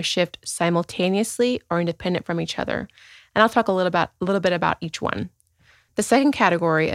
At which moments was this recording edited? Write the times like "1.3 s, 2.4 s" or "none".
5.9 s